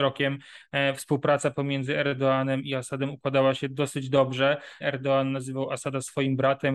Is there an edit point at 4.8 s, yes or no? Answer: yes